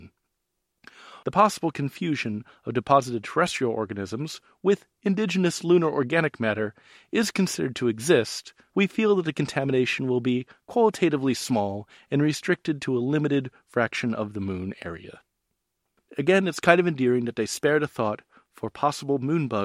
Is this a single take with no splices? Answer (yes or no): no